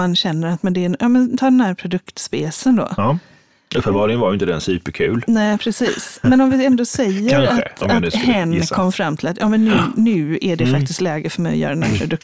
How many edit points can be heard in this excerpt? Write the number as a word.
zero